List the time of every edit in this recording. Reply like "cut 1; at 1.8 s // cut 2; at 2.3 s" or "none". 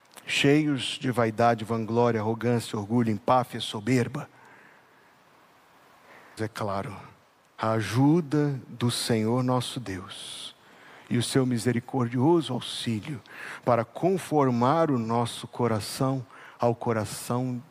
cut 1; at 6.4 s